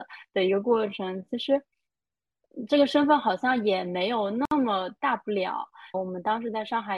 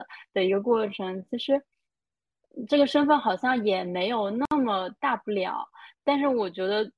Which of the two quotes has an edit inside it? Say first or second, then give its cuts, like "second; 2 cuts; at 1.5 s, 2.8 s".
first; 1 cut; at 5.9 s